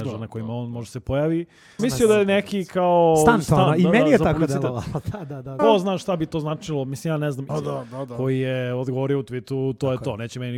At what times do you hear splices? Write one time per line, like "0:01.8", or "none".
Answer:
0:01.8
0:05.6
0:07.5